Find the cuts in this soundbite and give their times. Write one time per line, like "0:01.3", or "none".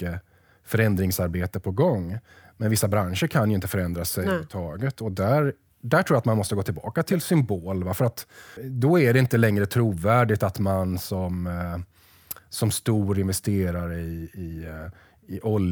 0:08.6